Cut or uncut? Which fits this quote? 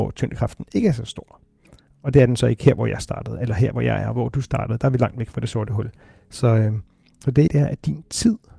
cut